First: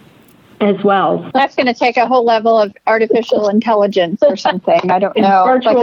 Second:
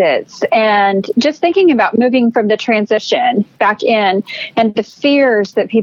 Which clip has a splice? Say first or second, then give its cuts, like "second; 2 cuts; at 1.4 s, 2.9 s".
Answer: first; 1 cut; at 1.3 s